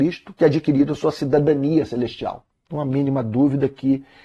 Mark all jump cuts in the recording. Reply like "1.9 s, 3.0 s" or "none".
2.5 s